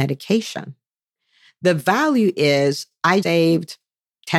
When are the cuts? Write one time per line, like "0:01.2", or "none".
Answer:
0:03.2